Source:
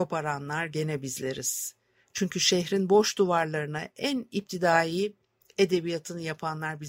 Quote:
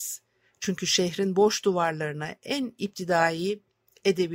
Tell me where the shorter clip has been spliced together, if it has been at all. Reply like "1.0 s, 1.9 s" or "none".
none